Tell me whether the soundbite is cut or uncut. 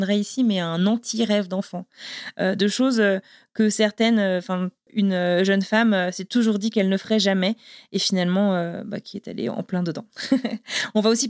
cut